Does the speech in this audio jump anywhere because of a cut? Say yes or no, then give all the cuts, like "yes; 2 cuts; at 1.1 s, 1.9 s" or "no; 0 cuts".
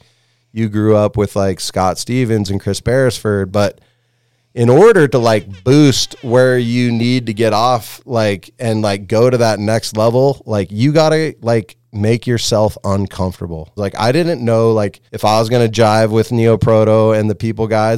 yes; 2 cuts; at 13.8 s, 15.1 s